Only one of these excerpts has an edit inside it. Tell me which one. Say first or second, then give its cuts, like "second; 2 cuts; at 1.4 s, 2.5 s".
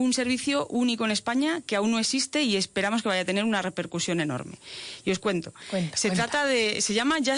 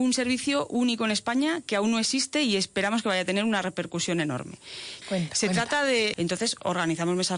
second; 2 cuts; at 5.0 s, 6.1 s